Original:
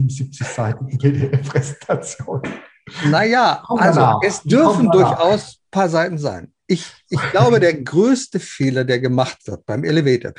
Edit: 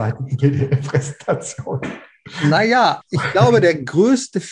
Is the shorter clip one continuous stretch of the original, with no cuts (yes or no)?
no